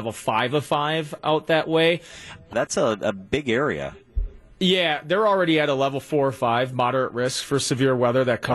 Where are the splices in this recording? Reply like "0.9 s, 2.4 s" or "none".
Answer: 2.5 s